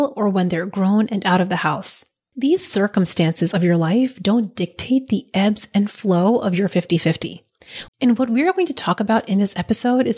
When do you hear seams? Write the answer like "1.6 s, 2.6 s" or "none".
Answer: 7.9 s